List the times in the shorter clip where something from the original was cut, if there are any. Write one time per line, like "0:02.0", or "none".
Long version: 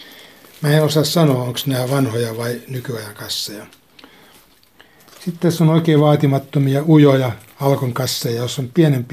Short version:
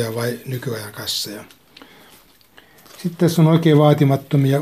none

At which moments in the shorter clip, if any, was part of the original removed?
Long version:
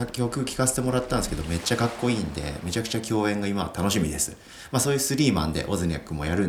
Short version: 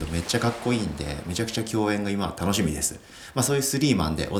none

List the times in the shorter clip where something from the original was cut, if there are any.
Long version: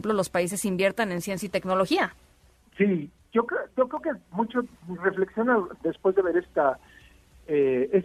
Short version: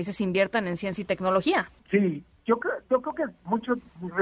0:01.8

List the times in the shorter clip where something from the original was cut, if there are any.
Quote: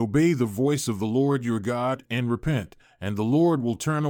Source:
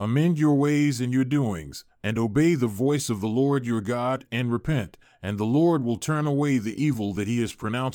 none

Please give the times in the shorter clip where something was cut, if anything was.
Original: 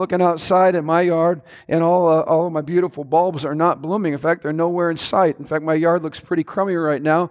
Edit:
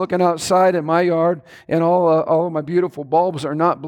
none

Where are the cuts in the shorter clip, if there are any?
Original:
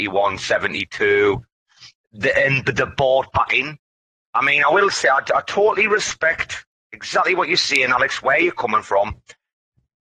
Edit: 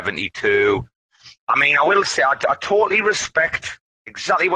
0:01.4

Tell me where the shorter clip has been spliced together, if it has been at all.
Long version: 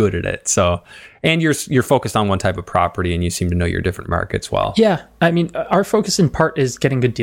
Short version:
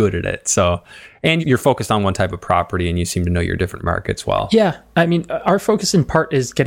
0:01.4

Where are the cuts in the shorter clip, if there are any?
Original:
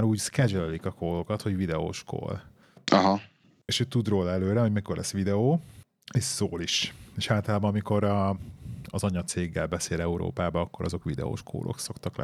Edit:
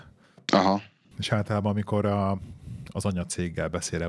0:01.1

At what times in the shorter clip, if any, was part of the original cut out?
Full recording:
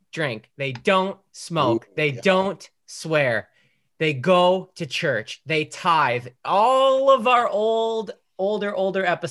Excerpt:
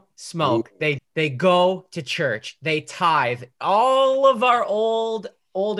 0:01.0

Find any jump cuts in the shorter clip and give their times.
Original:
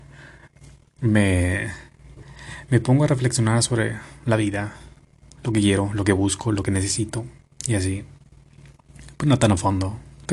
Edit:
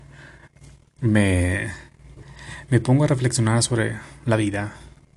none

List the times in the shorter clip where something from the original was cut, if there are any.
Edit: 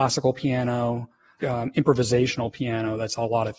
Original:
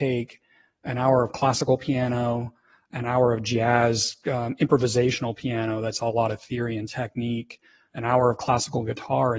0:01.4

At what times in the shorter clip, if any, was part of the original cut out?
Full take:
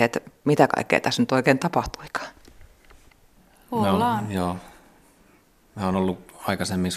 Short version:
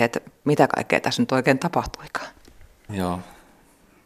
0:02.9

